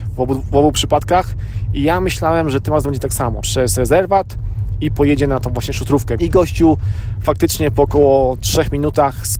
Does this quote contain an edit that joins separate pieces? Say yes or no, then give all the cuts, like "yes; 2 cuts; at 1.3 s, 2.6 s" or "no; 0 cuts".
yes; 2 cuts; at 3.4 s, 6.2 s